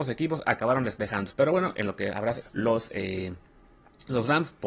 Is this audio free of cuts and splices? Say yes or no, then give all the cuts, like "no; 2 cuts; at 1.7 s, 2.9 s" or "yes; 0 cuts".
no; 2 cuts; at 1.3 s, 2.4 s